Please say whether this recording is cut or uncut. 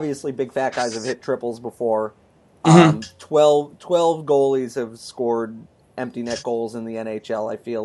uncut